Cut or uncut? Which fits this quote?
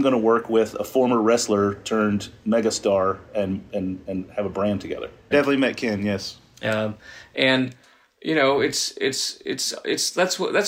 cut